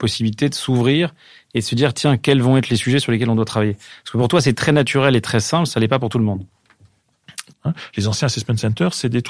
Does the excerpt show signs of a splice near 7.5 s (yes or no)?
yes